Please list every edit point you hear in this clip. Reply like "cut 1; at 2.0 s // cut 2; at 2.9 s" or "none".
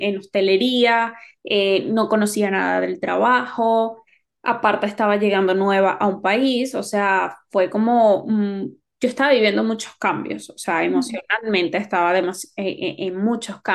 none